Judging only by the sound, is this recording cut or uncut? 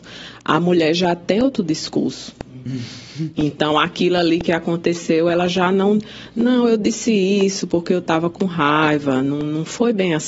uncut